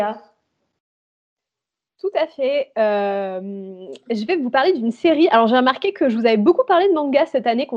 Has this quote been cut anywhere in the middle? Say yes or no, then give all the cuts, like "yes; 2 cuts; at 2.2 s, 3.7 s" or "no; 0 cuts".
no; 0 cuts